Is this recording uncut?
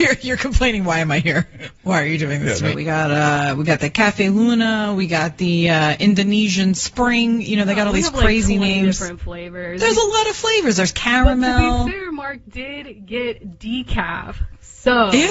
no; 1 cut; at 2.7 s

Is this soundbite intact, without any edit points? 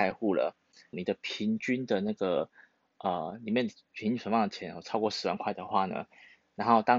no; 1 cut; at 0.9 s

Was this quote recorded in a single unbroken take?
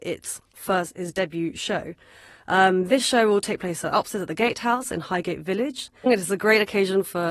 no; 1 cut; at 6.1 s

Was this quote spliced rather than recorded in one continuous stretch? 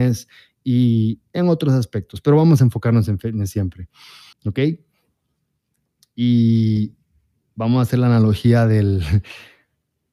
yes; 1 cut; at 4.3 s

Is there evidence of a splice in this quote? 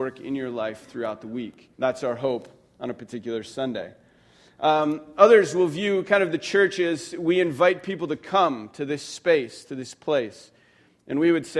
yes; 1 cut; at 1.7 s

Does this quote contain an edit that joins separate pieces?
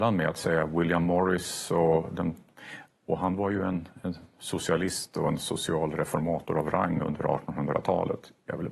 no; 0 cuts

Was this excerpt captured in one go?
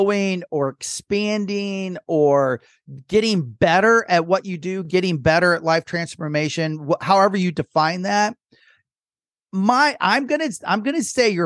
yes; 0 cuts

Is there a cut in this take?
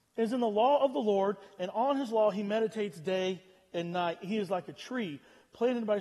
no; 0 cuts

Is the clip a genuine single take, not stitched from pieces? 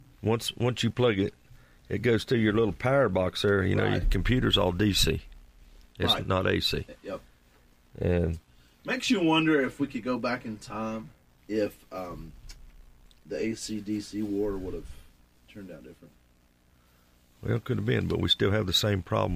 no; 1 cut; at 11.4 s

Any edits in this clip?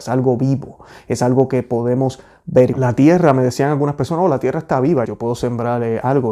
yes; 2 cuts; at 2.7 s, 5.0 s

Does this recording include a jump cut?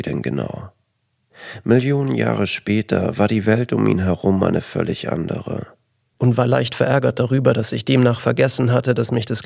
yes; 1 cut; at 6.1 s

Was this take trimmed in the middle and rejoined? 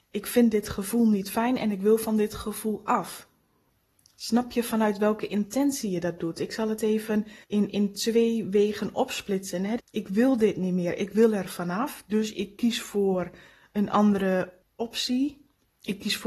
yes; 2 cuts; at 7.4 s, 9.8 s

